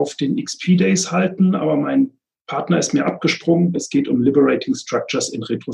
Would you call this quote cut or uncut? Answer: cut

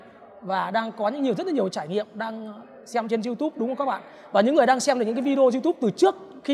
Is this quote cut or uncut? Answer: uncut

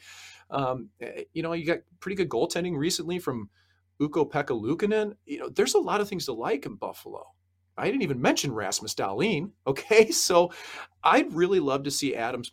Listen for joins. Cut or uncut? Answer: uncut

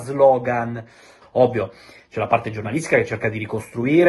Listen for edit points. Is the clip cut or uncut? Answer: cut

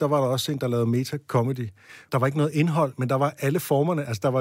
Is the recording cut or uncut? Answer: cut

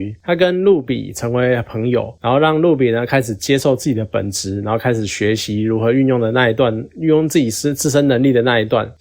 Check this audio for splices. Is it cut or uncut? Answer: uncut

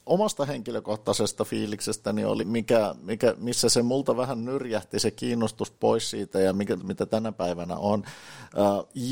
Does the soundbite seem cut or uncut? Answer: cut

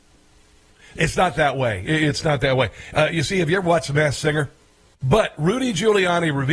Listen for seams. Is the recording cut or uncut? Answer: cut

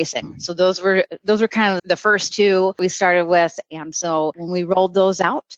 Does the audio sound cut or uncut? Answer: cut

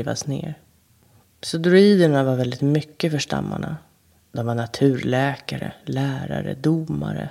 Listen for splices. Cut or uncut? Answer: cut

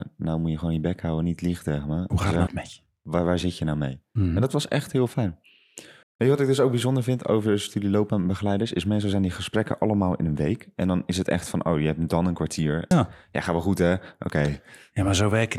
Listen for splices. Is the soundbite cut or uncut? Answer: cut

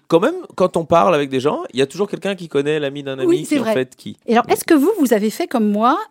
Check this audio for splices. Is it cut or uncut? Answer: cut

